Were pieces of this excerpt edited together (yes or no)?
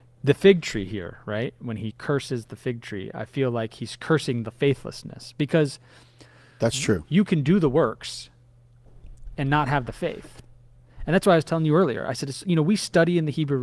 no